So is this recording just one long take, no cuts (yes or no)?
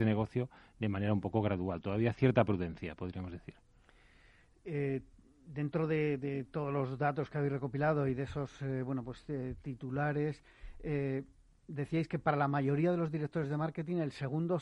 yes